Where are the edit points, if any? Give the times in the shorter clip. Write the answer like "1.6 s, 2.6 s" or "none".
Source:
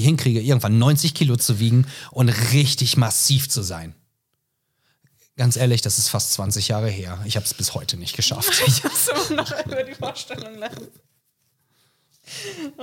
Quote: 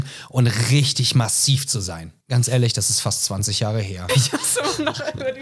2.2 s, 4.1 s